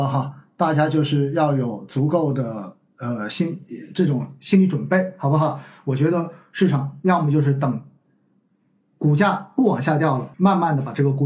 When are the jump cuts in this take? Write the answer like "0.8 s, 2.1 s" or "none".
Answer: 10.3 s